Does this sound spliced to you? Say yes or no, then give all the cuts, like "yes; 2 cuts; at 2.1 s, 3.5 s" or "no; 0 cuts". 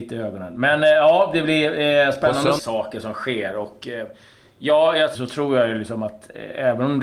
yes; 2 cuts; at 2.6 s, 5.1 s